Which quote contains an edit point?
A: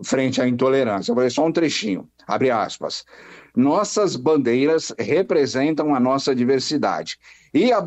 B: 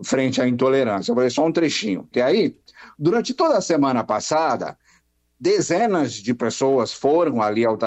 B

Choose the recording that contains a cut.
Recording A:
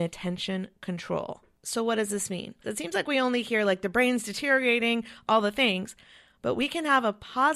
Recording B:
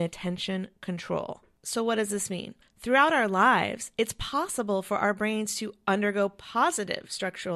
A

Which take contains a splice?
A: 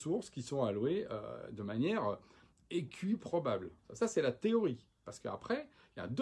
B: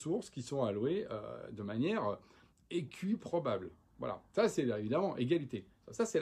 A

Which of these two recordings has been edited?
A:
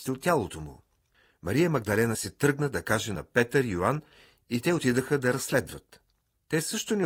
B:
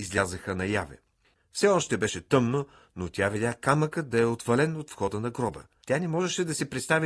B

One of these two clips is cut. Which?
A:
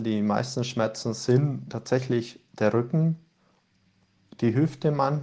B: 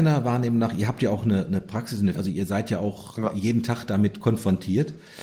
B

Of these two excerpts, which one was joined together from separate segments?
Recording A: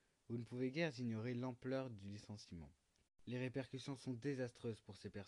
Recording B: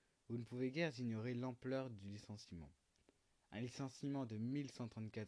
A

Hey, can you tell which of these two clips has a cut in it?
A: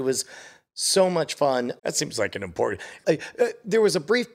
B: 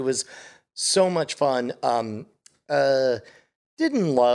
A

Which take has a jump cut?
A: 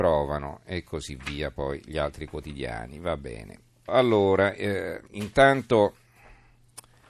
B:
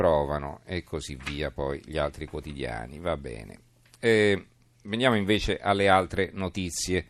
A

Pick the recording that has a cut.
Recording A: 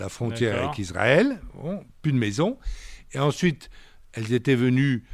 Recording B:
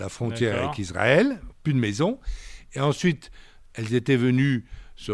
B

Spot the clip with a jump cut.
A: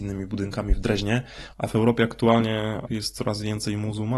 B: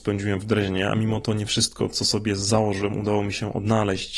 A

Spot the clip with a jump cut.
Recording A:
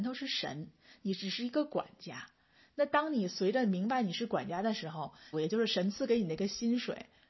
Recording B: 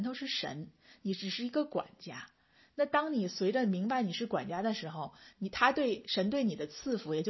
A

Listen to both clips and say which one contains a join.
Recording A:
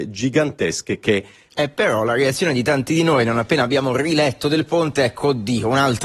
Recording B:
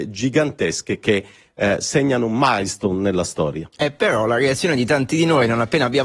A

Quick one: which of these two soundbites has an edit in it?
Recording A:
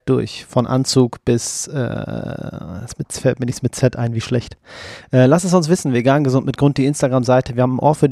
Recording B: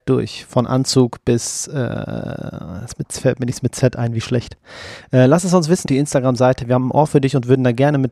B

